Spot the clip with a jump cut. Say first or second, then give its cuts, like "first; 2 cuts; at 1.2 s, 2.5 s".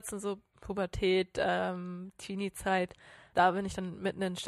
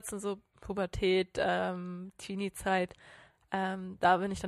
first; 1 cut; at 3.3 s